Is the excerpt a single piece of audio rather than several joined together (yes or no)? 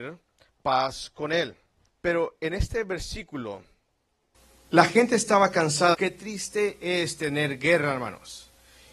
no